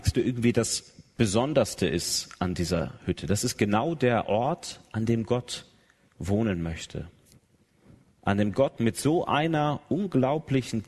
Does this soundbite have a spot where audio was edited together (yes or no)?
no